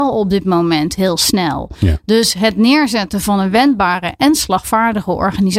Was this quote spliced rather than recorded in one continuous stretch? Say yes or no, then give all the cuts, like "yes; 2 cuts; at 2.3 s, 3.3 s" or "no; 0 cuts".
no; 0 cuts